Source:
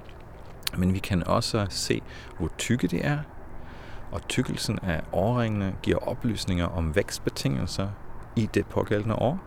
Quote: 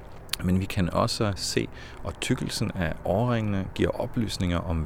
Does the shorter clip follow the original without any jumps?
no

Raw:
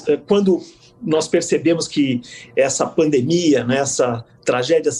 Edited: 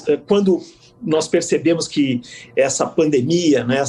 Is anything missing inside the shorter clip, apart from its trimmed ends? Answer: no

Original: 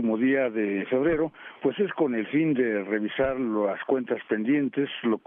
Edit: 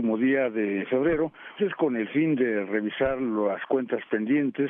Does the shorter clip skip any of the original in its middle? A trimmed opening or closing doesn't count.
yes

